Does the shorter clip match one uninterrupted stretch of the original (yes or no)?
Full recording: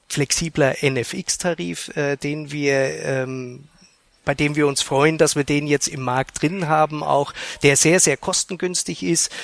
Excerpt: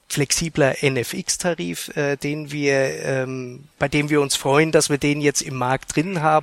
no